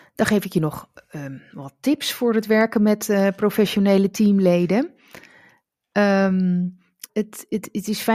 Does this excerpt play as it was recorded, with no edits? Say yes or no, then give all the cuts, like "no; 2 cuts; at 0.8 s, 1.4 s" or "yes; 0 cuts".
no; 1 cut; at 7.1 s